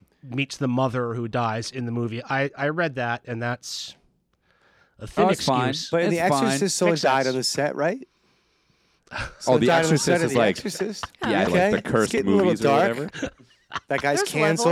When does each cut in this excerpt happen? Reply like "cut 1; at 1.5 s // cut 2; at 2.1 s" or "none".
cut 1; at 11.5 s // cut 2; at 13.1 s